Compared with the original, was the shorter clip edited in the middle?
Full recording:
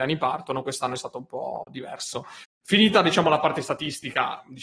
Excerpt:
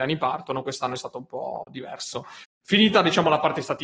no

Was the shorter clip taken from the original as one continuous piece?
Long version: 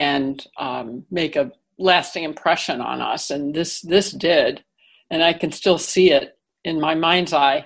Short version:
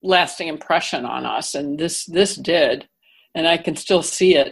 yes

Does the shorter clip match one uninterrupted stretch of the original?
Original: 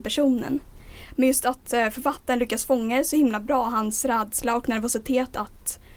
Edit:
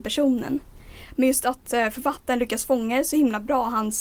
yes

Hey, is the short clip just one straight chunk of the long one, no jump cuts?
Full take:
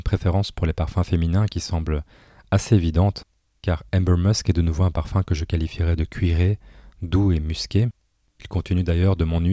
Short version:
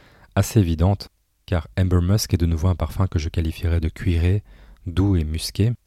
yes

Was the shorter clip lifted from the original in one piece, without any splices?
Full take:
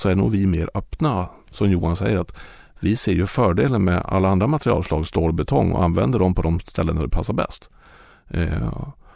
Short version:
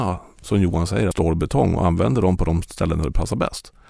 no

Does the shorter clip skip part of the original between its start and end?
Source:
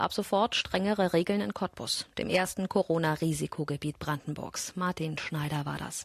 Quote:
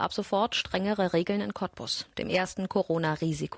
no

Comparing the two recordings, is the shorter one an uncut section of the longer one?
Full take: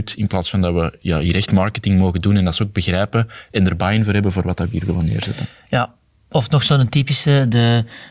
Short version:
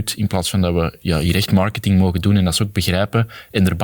yes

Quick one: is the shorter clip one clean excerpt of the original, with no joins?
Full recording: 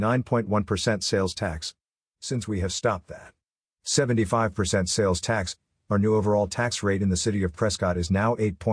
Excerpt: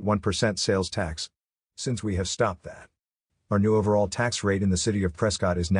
no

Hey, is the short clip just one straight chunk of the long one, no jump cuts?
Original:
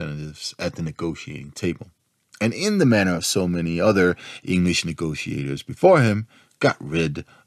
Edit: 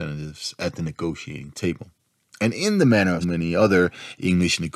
no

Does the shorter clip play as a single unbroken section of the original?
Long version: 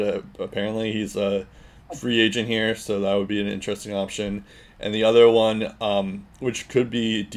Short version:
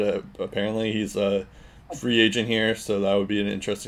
yes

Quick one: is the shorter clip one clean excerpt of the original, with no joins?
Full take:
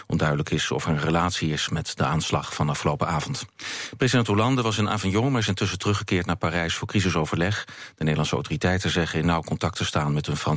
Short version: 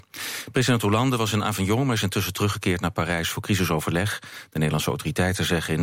yes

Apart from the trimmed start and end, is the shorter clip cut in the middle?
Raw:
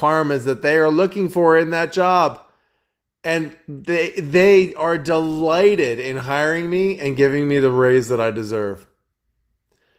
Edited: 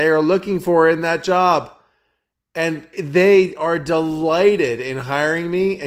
yes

